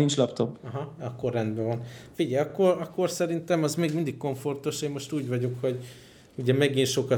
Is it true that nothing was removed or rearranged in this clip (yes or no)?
yes